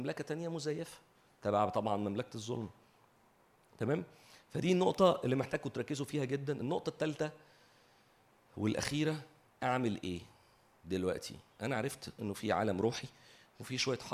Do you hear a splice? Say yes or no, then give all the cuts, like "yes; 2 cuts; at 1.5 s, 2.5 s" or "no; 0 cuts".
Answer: no; 0 cuts